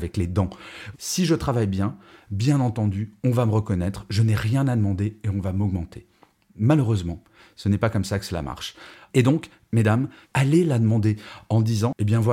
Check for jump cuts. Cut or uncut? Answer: cut